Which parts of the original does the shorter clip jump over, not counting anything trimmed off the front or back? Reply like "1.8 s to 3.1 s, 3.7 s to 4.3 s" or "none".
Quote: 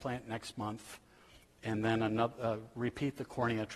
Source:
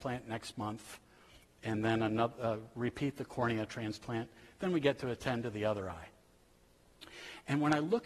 none